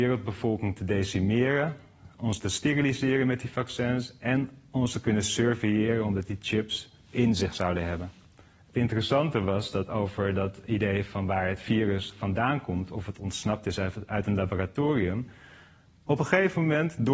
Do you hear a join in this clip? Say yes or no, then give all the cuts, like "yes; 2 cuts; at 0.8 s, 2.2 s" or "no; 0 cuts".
yes; 1 cut; at 8.6 s